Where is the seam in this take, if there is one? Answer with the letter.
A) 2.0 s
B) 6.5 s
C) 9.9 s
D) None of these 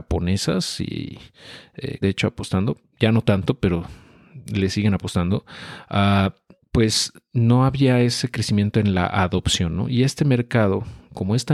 A